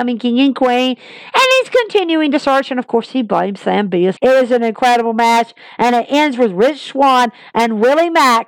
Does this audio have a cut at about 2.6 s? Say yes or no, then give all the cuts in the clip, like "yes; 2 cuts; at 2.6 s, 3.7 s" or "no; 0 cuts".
no; 1 cut; at 4.2 s